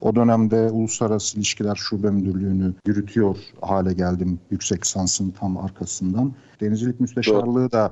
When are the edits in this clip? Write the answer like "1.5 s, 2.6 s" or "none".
2.8 s, 6.5 s